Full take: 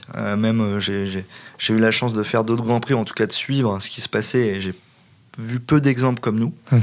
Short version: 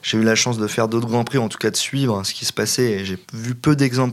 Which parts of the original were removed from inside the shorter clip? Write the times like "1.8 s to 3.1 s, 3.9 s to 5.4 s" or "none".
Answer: 4.8 s to 5.3 s